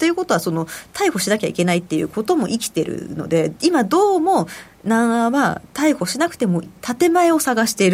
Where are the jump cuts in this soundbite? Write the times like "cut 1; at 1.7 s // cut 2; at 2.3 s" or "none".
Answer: cut 1; at 6.6 s